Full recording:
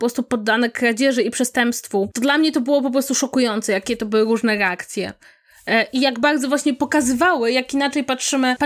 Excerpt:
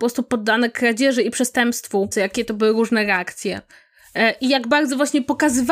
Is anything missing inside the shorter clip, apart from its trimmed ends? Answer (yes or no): yes